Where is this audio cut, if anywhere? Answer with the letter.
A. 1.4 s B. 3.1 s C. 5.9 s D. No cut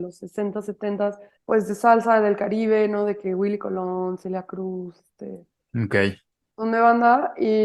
A